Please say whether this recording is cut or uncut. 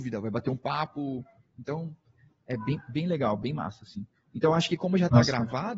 uncut